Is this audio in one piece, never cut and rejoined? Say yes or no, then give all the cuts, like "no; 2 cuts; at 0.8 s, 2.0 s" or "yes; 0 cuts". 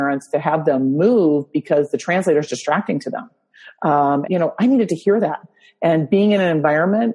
no; 1 cut; at 4.2 s